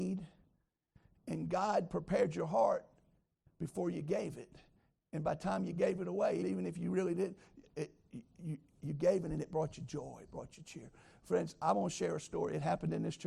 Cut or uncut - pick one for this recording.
cut